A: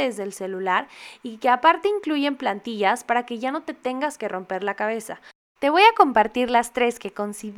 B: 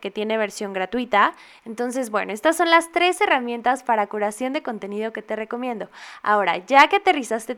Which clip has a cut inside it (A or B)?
B